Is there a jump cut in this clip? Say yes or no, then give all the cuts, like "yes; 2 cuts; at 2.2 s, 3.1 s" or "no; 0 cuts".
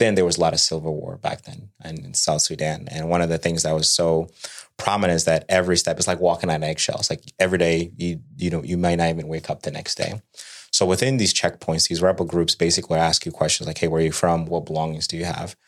yes; 1 cut; at 14.5 s